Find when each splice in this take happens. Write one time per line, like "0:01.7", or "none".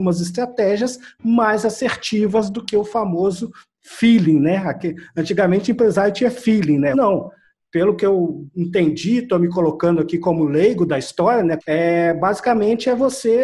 0:06.9
0:11.6